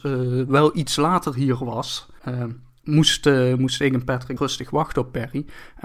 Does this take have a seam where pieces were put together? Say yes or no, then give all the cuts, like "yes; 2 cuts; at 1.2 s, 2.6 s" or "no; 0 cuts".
yes; 2 cuts; at 2.2 s, 4.4 s